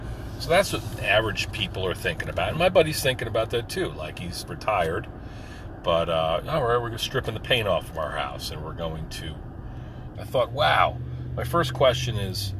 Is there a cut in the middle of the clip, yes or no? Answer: yes